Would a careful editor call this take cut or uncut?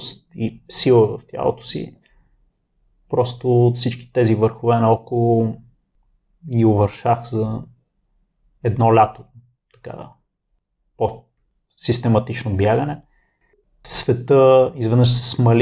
uncut